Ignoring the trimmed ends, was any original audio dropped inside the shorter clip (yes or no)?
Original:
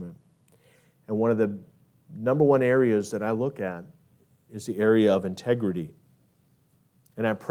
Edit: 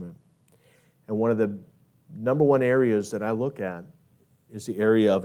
no